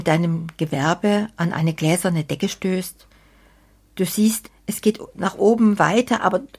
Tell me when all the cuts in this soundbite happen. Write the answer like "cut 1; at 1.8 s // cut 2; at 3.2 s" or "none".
cut 1; at 4.5 s